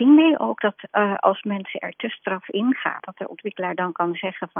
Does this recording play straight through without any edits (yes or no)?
no